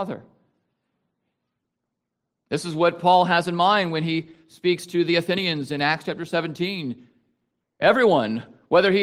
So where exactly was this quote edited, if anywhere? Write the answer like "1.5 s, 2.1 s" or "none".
none